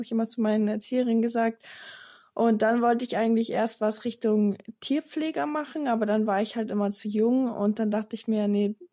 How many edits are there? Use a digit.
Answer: 0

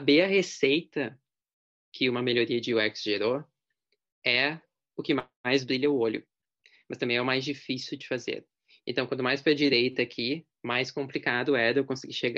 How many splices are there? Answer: 0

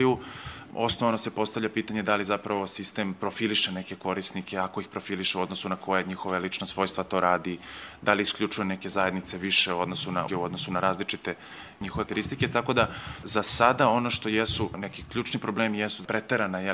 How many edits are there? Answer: 2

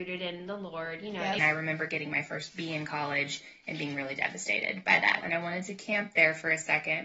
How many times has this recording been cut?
2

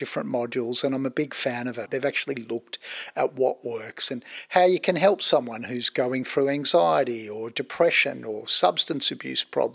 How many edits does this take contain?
1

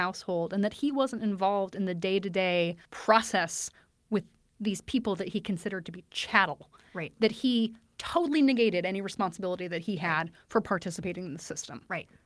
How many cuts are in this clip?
1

